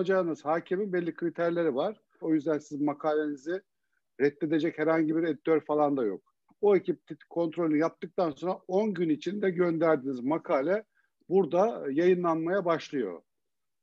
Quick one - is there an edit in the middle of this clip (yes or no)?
yes